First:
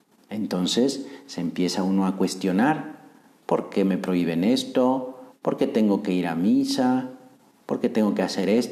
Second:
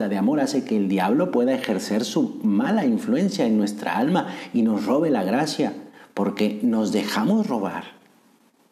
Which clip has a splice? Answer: first; 1 cut; at 5.3 s

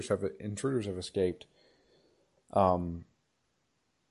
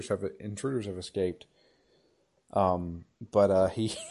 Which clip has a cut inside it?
second; 1 cut; at 3.1 s

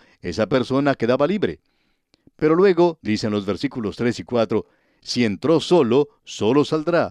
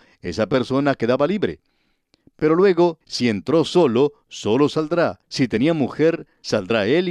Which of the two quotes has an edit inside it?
second; 2 cuts; at 3.0 s, 5.2 s

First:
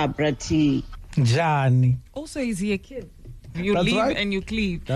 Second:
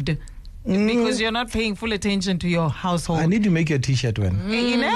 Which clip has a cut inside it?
first; 2 cuts; at 2.1 s, 3.5 s

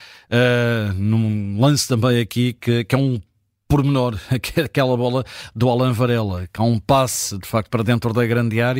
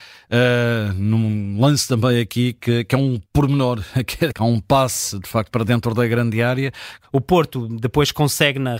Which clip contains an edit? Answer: second; 3 cuts; at 3.3 s, 4.3 s, 7.0 s

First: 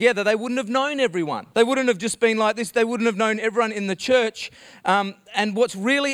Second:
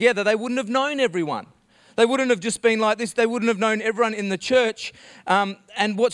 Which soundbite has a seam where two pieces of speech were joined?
first; 1 cut; at 1.5 s

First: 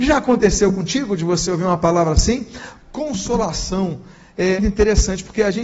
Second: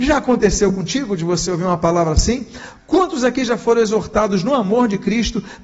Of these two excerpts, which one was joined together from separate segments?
first; 2 cuts; at 2.8 s, 4.6 s

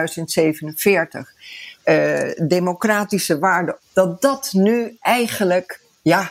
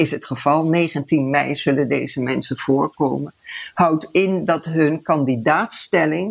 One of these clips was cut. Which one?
first; 2 cuts; at 1.8 s, 3.8 s

